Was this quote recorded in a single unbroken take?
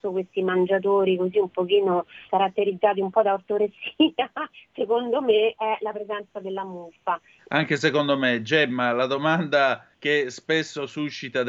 no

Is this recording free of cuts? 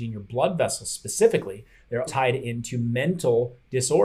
no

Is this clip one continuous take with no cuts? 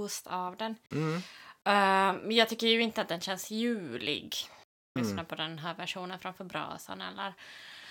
no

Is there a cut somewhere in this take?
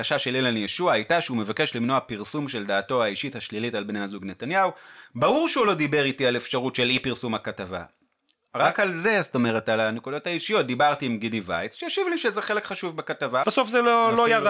yes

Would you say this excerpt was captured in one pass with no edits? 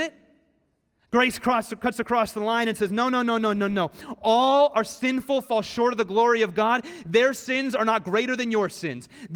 yes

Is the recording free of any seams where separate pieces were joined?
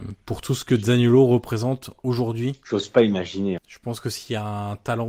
no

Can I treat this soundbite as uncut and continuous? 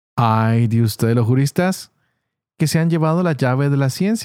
yes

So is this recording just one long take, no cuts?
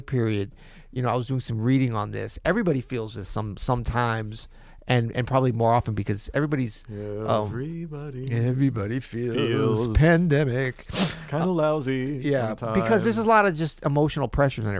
yes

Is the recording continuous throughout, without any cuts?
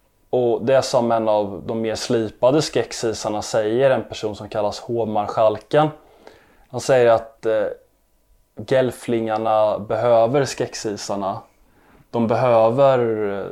yes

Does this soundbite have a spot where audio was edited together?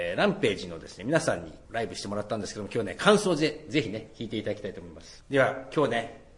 no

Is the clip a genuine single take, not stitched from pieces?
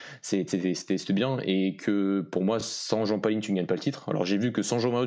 yes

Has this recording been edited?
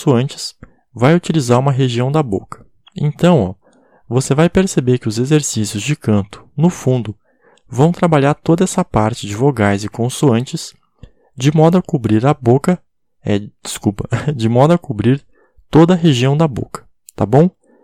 no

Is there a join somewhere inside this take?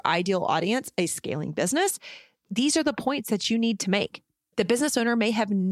no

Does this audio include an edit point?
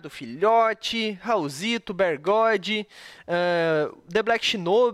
no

